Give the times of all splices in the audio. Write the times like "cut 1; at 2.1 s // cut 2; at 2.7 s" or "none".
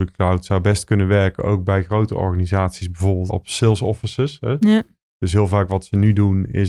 cut 1; at 3.3 s

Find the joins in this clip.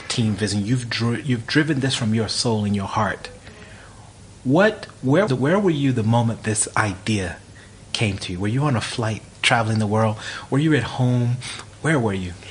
cut 1; at 5.3 s

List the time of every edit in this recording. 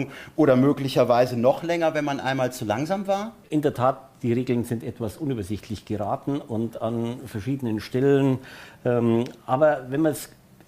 cut 1; at 3.4 s

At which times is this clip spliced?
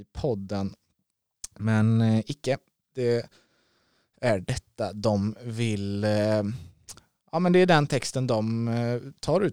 none

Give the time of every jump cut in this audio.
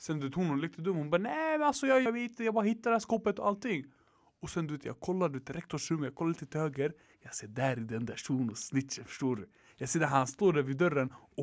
cut 1; at 2.1 s

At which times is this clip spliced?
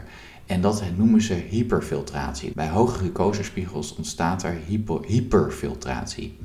cut 1; at 2.5 s

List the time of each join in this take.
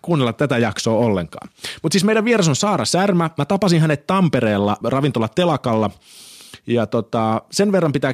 cut 1; at 4.8 s

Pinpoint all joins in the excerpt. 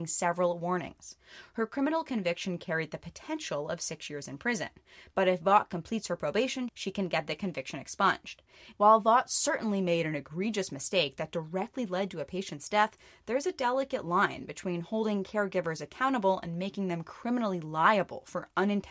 cut 1; at 8.7 s

